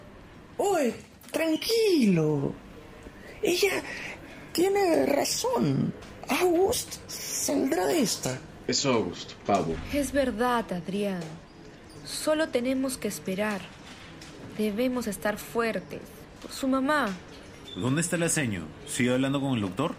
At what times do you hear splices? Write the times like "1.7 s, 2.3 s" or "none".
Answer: none

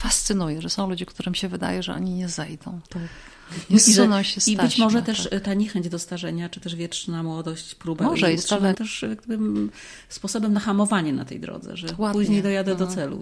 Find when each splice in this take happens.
8.7 s

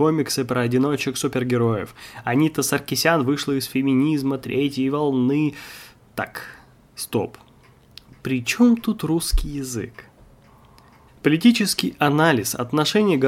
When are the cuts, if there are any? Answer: 11.1 s

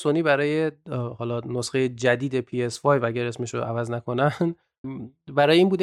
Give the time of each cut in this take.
4.8 s

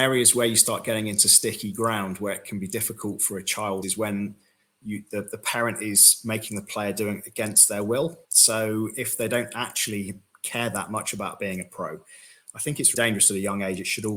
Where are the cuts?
3.8 s, 8.2 s, 12.9 s

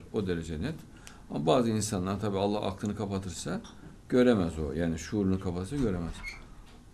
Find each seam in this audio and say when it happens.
none

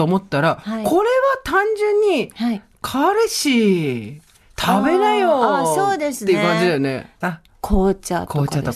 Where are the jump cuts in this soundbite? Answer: 7.2 s

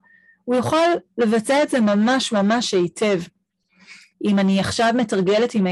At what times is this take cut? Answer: 4.1 s

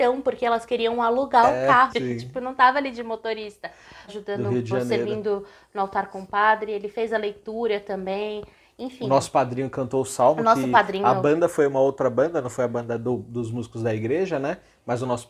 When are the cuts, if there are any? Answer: 1.9 s, 4.1 s

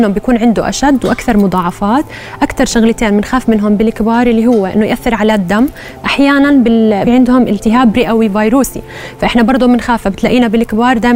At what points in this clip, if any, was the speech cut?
6.0 s, 7.0 s

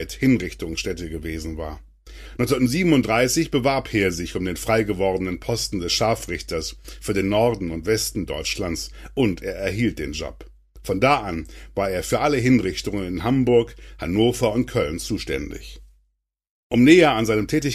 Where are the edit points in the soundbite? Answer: 2.4 s

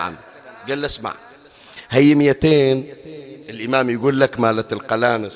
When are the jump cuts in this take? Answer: 3.4 s

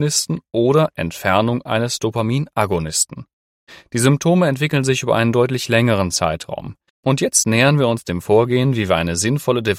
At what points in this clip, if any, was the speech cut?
6.9 s

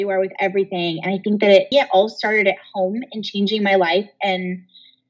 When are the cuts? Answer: 1.7 s

